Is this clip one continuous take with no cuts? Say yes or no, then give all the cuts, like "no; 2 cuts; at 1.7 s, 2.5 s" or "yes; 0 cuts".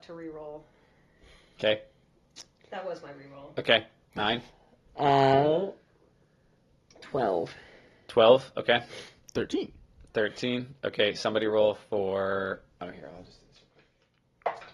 yes; 0 cuts